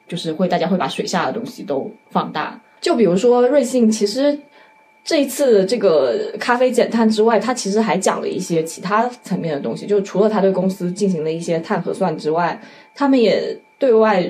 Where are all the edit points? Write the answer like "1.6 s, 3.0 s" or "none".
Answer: 2.8 s